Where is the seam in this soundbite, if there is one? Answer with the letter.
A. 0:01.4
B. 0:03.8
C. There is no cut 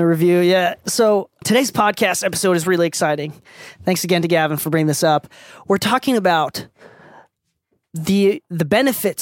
A